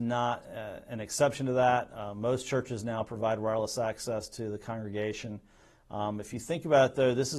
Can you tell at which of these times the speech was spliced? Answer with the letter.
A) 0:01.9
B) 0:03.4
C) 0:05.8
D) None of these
D